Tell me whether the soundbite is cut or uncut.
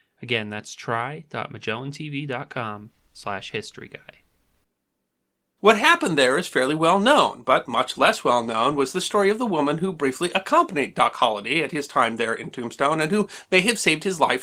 cut